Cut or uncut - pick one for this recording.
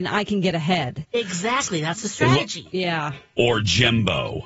cut